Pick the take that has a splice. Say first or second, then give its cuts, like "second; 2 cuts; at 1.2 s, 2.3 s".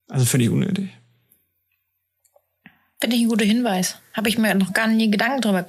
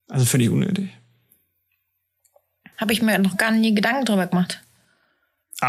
second; 1 cut; at 2.7 s